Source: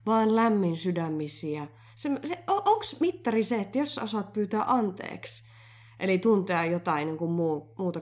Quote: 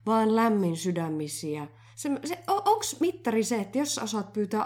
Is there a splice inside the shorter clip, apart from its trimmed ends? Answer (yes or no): no